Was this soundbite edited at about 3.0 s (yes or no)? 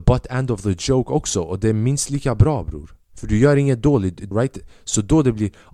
yes